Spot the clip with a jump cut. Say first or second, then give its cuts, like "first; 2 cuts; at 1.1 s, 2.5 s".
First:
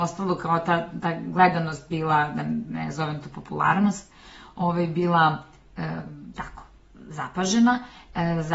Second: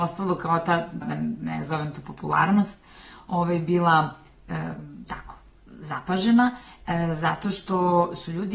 second; 1 cut; at 1.0 s